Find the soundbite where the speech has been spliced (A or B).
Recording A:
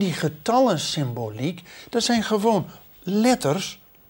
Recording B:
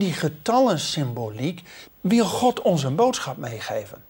B